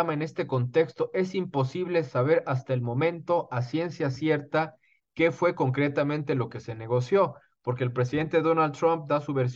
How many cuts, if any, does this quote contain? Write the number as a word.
zero